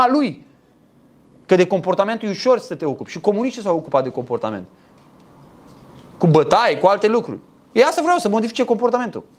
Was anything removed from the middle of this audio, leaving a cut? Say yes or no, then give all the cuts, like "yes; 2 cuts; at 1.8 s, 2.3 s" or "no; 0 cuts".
no; 0 cuts